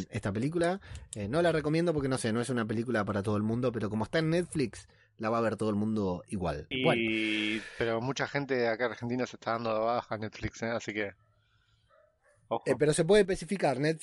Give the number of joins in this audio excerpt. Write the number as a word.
one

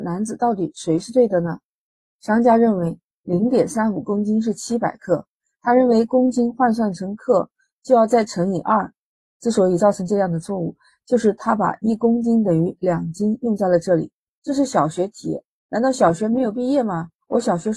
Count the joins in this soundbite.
one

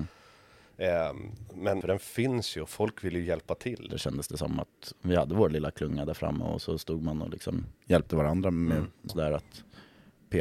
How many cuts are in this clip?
three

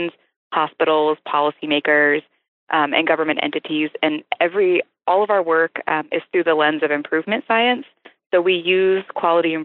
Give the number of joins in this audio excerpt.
zero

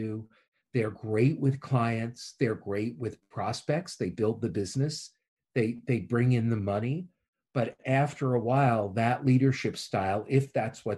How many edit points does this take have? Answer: zero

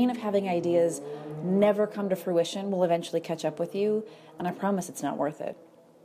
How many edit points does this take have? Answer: zero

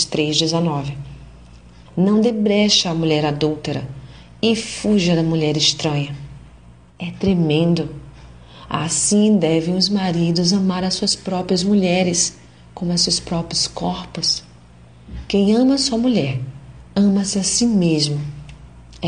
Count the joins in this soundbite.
two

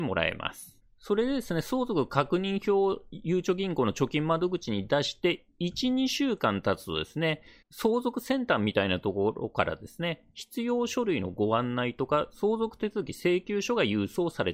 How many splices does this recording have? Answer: zero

